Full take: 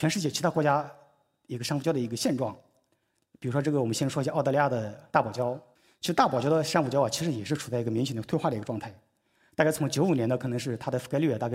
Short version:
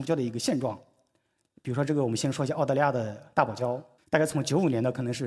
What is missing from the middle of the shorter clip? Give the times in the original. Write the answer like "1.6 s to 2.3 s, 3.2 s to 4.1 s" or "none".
5.8 s to 9.5 s